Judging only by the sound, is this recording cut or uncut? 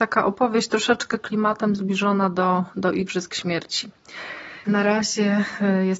cut